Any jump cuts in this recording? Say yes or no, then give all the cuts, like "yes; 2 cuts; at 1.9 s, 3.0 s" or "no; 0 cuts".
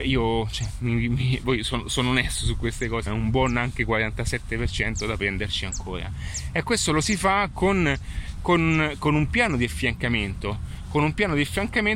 yes; 1 cut; at 3.1 s